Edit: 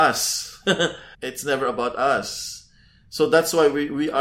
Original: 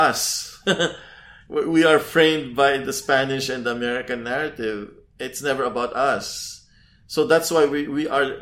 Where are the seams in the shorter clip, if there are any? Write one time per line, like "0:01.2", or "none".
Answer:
0:01.1